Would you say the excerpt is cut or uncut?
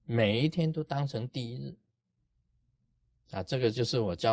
uncut